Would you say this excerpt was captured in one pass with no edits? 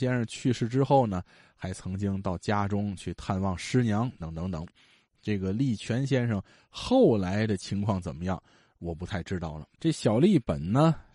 no; 2 cuts; at 4.2 s, 9.7 s

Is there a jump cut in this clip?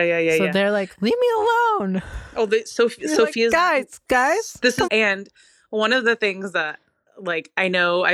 yes; 1 cut; at 4.9 s

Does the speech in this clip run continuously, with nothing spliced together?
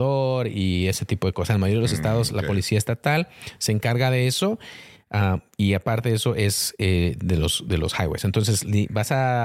yes; 0 cuts

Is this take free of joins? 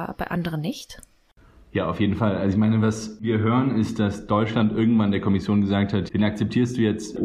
no; 1 cut; at 6.1 s

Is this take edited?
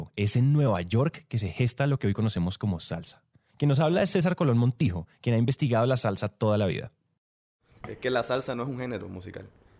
no; 0 cuts

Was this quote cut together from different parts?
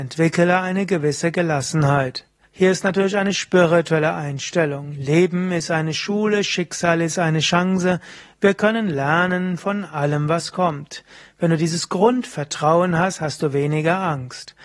yes; 1 cut; at 2.4 s

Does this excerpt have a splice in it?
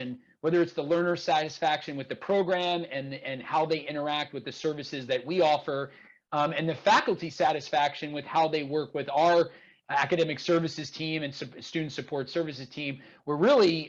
no; 0 cuts

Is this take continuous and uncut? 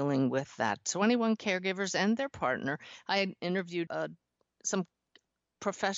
no; 1 cut; at 3.9 s

